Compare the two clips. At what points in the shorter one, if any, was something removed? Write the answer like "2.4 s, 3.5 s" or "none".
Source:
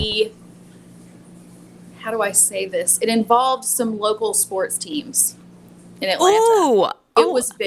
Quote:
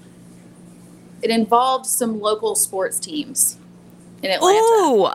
1.2 s